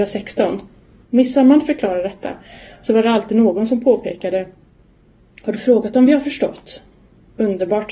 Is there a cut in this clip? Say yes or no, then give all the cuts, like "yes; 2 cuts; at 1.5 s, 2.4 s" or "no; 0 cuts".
yes; 1 cut; at 1.0 s